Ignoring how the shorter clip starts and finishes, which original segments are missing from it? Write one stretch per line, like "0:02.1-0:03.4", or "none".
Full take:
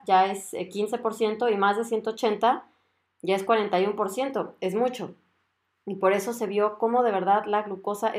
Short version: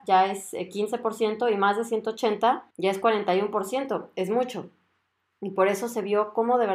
0:02.7-0:03.2